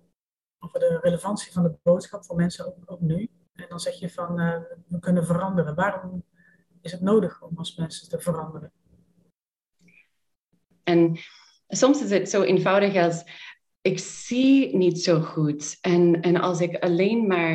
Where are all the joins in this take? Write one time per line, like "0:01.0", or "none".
0:10.8